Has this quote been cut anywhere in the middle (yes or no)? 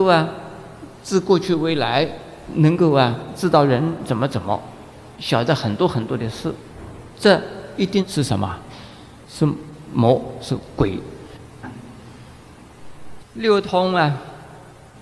yes